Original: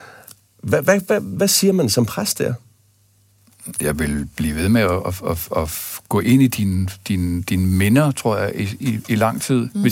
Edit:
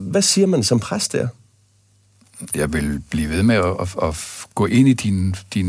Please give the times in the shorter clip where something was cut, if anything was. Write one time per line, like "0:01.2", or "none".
0:03.9